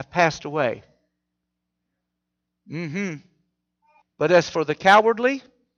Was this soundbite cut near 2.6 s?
no; 1 cut; at 4.0 s

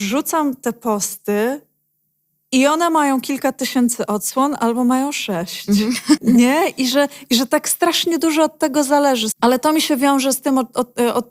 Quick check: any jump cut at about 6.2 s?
yes; 2 cuts; at 6.2 s, 9.3 s

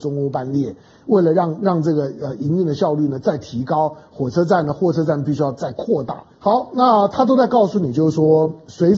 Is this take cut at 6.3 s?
yes; 1 cut; at 6.3 s

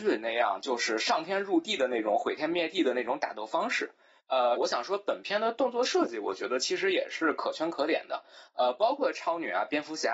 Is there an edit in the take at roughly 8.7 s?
no; 1 cut; at 4.6 s

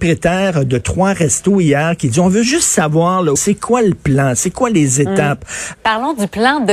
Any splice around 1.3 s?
no; 2 cuts; at 3.4 s, 5.7 s

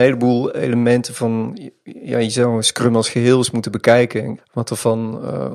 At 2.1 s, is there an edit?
no; 1 cut; at 4.4 s

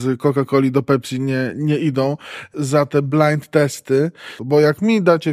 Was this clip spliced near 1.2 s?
no; 1 cut; at 4.4 s

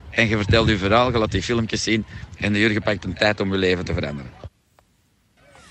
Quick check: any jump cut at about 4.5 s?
no; 0 cuts

